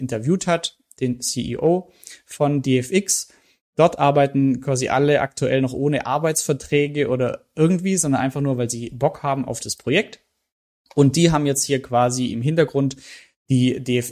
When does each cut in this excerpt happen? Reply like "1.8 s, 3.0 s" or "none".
3.6 s